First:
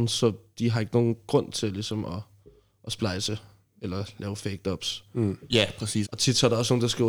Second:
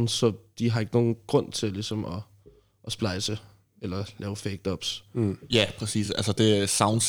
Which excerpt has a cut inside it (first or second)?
first